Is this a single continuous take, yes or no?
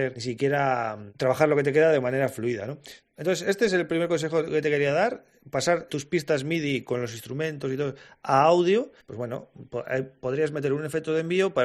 no